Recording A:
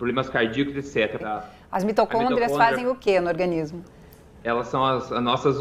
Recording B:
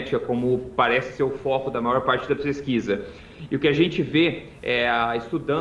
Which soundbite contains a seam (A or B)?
A